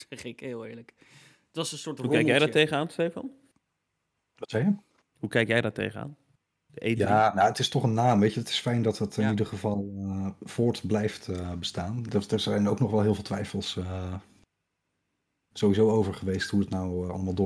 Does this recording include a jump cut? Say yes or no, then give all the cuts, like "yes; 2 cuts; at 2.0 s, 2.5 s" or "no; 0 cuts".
no; 0 cuts